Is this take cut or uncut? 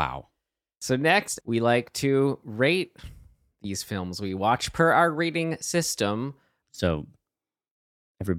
cut